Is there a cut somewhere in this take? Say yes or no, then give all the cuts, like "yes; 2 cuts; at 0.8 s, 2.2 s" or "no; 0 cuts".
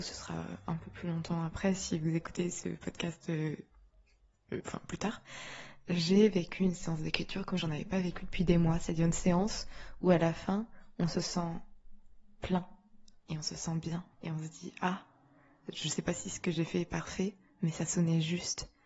yes; 2 cuts; at 4.6 s, 14.1 s